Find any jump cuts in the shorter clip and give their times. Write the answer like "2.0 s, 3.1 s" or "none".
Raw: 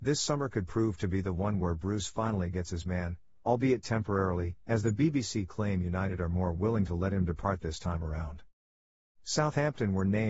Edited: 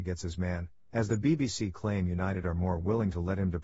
0.9 s